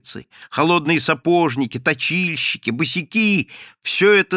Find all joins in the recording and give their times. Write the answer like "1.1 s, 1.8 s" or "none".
none